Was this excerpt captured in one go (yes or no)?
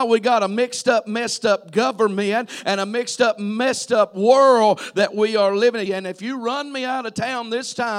no